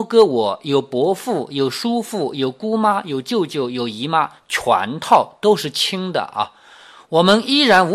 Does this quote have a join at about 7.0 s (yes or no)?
no